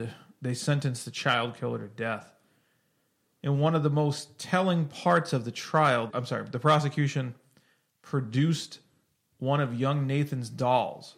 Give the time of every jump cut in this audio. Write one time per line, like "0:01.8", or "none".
0:06.1